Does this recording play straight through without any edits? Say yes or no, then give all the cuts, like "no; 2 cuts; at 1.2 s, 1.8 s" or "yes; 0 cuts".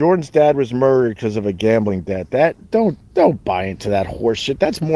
yes; 0 cuts